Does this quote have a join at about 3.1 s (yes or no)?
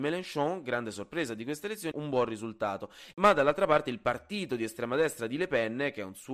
yes